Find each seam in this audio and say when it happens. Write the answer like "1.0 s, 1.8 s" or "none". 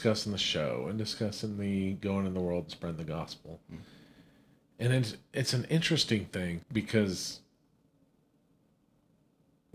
6.6 s